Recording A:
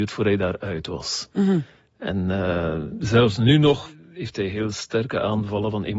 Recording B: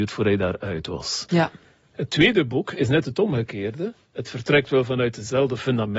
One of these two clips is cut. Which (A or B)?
B